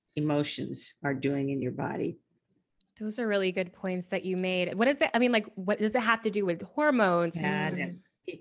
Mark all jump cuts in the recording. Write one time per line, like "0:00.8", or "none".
0:04.7
0:07.3